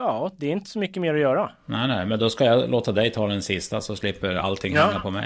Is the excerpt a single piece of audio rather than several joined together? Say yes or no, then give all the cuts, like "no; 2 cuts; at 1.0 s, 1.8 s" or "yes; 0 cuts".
yes; 0 cuts